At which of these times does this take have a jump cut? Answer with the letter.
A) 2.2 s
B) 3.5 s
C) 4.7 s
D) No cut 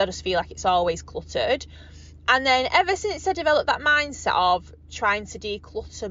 D